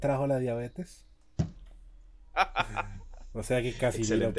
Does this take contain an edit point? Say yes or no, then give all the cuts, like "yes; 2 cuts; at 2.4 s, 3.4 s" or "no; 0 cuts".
yes; 1 cut; at 2.3 s